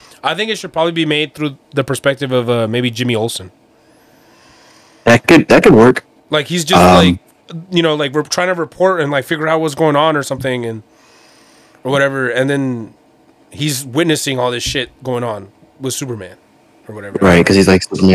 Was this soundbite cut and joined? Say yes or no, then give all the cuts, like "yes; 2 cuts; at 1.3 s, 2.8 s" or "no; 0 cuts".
no; 0 cuts